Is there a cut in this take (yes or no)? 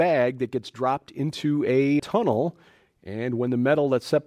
yes